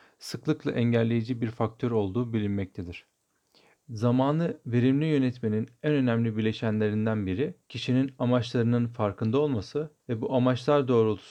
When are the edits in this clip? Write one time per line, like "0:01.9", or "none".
0:03.8
0:07.6
0:10.0

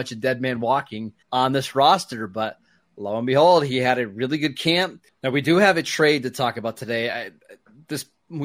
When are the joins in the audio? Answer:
0:01.2
0:05.1

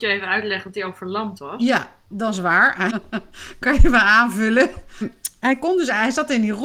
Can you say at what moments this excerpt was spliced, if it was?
0:02.9
0:05.0

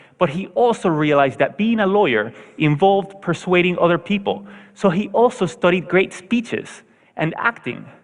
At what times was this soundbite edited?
none

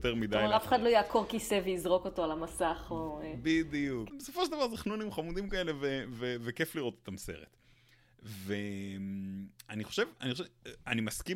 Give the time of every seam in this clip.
0:04.1

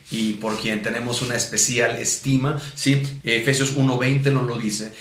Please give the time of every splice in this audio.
0:03.2

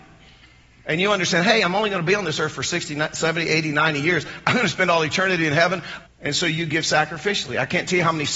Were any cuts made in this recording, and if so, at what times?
0:06.1

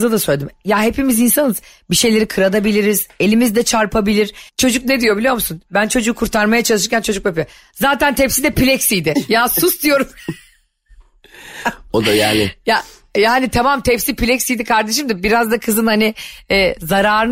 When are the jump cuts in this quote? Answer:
0:04.5

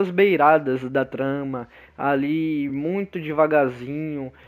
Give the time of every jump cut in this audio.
none

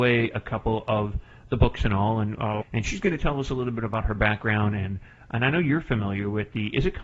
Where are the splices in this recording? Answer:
0:02.6

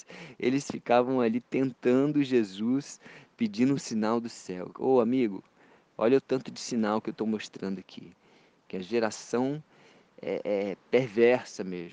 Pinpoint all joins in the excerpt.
none

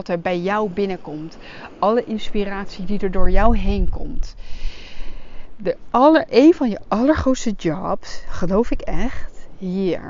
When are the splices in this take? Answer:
none

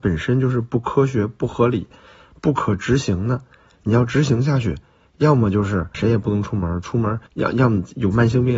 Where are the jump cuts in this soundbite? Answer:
0:05.9
0:07.3

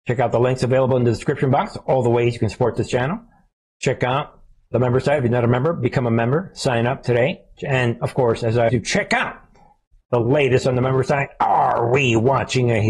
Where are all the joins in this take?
0:08.7

